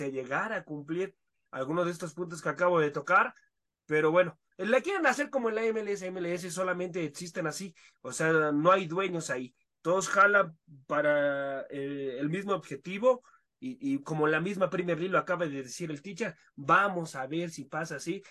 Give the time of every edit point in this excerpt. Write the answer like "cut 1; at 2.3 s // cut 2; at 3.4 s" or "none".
none